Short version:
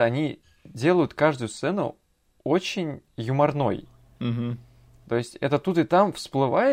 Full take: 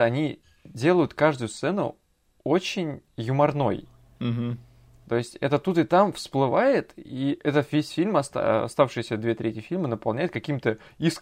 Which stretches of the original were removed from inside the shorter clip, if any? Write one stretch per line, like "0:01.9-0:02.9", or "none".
none